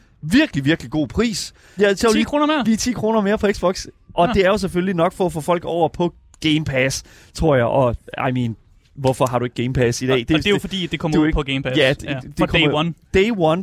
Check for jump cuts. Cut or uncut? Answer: cut